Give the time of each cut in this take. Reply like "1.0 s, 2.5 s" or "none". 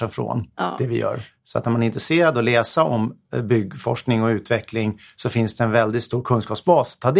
1.3 s

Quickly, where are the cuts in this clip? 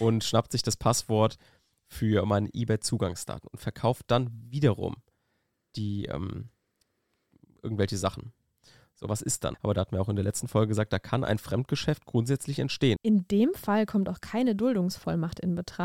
9.5 s, 13.0 s

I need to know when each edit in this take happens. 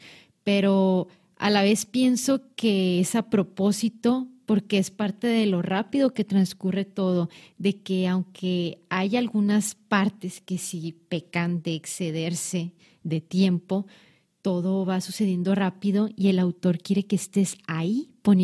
none

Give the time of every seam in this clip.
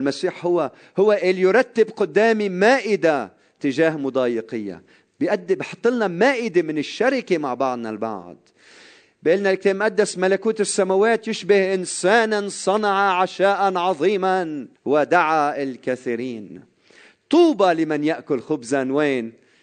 14.8 s

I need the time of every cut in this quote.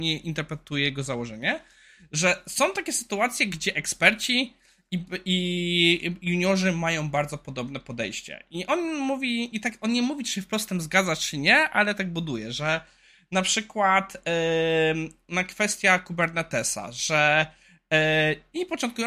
none

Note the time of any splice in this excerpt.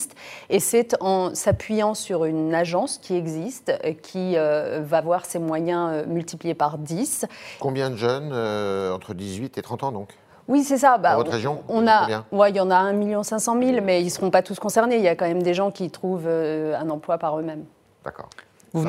7.6 s

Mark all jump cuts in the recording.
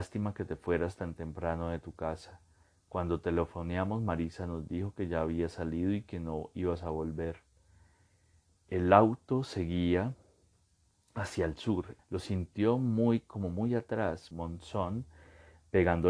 8.5 s, 12.0 s, 14.3 s

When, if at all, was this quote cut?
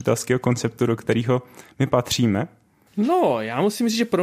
2.9 s

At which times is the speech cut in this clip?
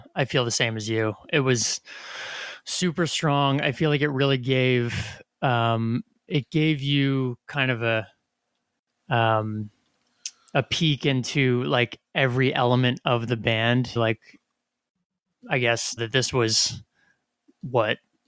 14.0 s, 16.0 s

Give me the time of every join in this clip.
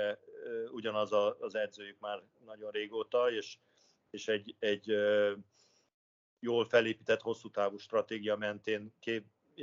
none

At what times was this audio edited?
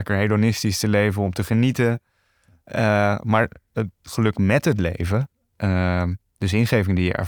none

